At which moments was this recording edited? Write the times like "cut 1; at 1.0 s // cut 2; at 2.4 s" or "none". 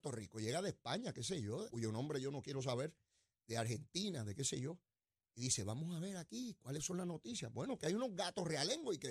cut 1; at 1.7 s